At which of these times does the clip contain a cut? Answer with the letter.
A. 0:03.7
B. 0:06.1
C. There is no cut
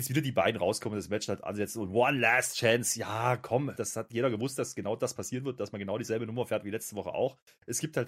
A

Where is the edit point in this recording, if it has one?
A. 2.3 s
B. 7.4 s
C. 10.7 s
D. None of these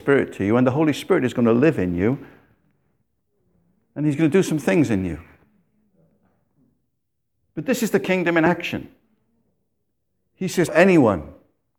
C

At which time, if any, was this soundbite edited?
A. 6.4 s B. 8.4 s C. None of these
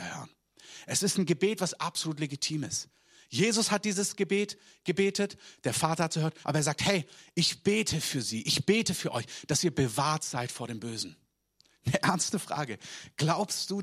A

